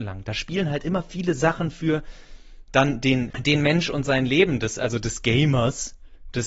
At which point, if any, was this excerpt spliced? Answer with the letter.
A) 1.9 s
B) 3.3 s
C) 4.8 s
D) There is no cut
B